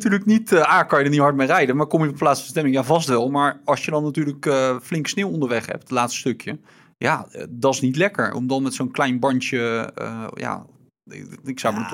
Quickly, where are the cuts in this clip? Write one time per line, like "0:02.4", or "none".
none